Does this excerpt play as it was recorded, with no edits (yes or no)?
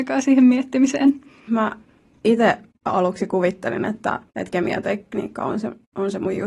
no